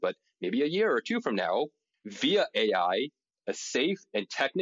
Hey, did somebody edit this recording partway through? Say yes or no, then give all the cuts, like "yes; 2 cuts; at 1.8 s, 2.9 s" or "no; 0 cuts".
no; 0 cuts